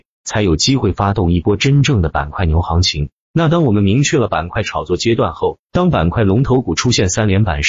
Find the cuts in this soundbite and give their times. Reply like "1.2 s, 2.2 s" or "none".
3.2 s, 5.7 s